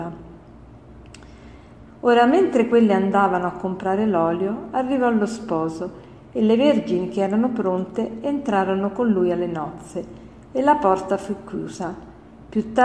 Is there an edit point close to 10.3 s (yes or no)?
no